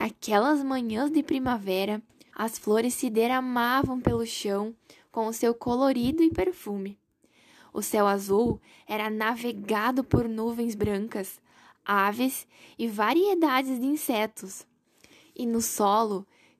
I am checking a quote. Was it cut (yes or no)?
yes